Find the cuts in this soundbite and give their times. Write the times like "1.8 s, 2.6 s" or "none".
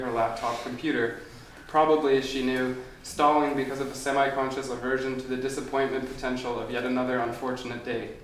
none